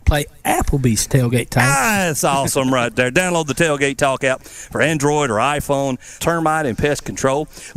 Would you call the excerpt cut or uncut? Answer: cut